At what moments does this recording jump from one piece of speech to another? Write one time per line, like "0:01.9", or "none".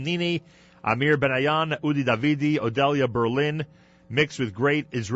none